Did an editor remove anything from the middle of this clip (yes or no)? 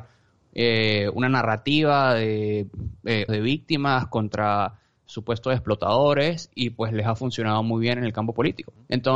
yes